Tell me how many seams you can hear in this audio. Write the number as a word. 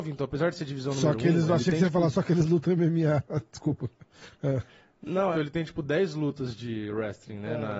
one